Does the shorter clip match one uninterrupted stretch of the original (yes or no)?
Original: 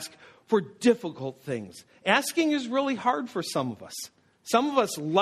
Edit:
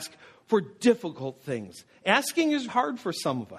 no